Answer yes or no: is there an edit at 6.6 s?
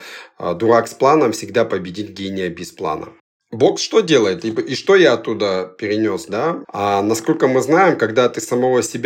yes